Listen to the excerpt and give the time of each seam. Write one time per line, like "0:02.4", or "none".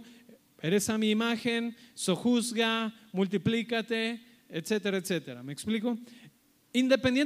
none